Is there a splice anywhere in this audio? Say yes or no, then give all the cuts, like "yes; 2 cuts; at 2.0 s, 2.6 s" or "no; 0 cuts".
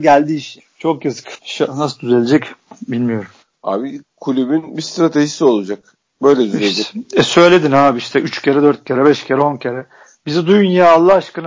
no; 0 cuts